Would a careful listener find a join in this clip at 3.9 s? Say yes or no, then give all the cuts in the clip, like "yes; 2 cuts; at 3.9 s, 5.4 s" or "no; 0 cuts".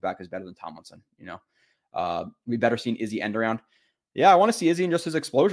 no; 0 cuts